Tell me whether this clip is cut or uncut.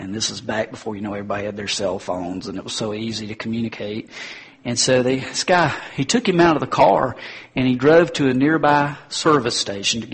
uncut